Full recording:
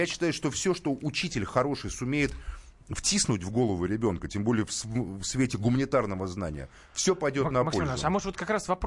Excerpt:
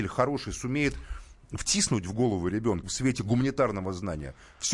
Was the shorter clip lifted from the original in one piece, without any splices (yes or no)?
no